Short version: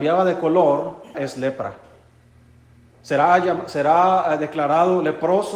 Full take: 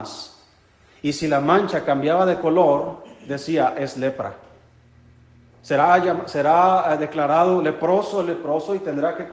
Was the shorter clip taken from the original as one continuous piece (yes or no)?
no